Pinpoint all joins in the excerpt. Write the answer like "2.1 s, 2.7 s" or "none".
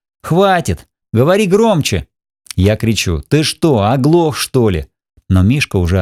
1.0 s